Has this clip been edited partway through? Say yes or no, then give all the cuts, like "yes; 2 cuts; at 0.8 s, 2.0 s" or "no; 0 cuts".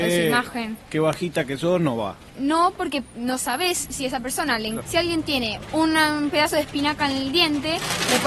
yes; 1 cut; at 4.8 s